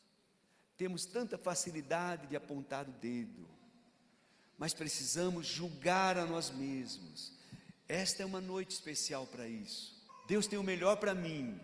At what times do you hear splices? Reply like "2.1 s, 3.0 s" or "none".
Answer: 10.1 s